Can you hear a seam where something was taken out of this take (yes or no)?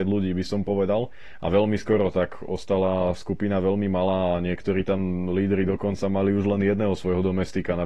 no